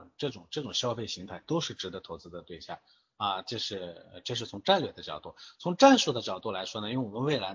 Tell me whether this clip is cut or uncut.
uncut